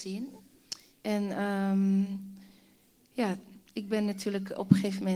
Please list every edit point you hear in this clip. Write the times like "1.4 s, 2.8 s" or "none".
0.9 s

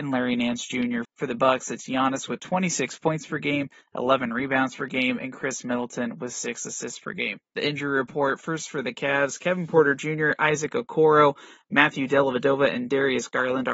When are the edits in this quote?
1.0 s, 7.5 s

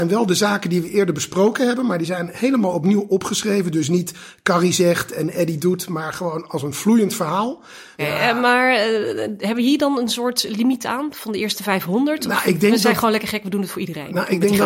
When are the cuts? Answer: 8.0 s

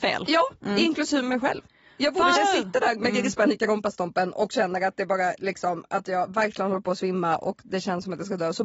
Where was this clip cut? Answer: 2.4 s

